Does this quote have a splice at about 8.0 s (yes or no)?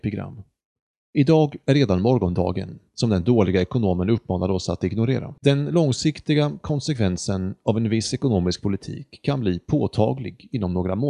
no